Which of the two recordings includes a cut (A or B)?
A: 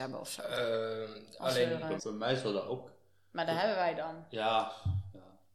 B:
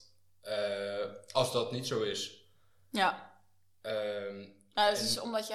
A